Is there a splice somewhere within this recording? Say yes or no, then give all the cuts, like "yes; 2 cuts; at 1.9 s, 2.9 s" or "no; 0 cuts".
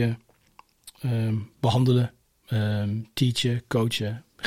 no; 0 cuts